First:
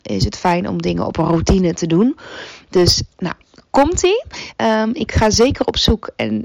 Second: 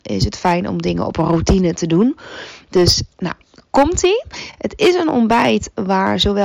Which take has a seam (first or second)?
first